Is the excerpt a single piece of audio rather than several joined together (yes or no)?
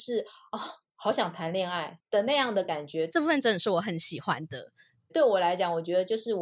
no